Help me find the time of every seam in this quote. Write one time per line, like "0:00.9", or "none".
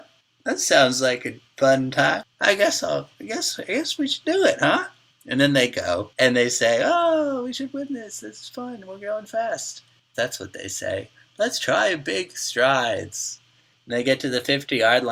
0:10.1